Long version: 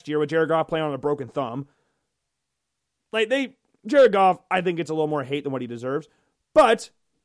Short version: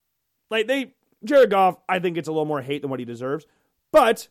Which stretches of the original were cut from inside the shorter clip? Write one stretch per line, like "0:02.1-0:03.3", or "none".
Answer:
none